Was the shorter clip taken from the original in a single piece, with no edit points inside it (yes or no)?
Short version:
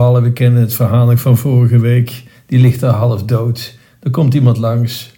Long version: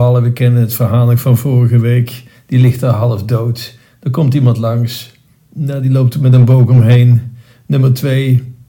yes